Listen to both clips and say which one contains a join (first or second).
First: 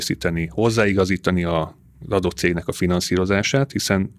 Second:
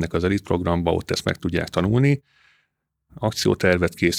second